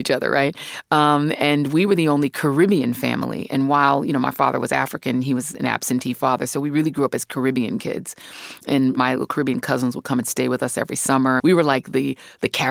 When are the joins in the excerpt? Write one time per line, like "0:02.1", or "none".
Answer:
0:11.4